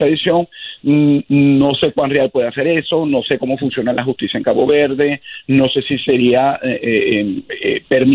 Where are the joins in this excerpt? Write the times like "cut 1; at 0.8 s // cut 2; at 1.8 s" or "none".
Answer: none